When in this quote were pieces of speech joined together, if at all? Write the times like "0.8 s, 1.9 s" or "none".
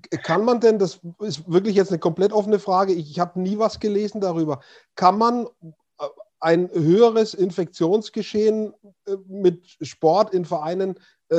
none